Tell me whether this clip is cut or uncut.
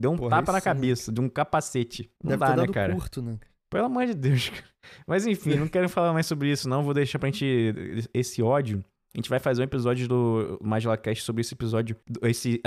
uncut